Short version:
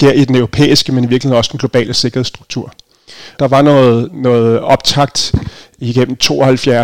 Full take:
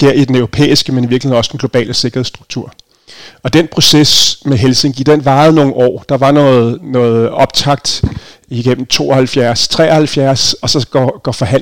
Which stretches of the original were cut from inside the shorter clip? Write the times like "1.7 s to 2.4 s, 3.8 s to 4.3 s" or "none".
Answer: 3.4 s to 6.1 s